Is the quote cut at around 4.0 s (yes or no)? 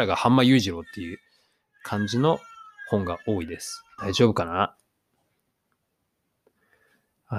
yes